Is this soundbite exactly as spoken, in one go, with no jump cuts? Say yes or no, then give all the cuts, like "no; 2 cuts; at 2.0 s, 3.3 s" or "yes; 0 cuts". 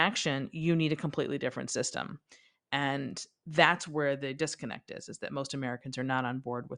yes; 0 cuts